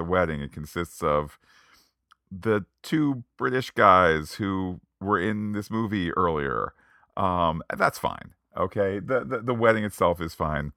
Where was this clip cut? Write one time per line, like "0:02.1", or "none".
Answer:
none